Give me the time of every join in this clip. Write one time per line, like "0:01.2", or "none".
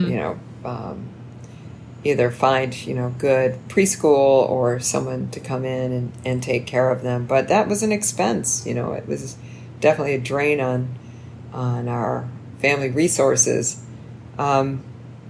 none

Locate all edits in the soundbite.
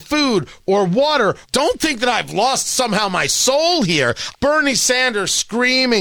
0:01.4
0:04.3

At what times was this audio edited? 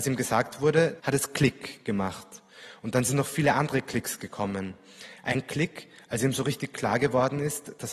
0:01.0
0:02.8

